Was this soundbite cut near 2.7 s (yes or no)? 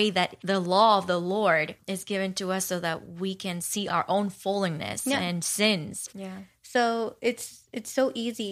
no